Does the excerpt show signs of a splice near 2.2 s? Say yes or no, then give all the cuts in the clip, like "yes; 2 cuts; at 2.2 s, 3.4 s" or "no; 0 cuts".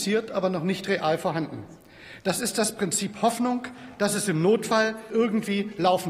yes; 2 cuts; at 2.2 s, 5.1 s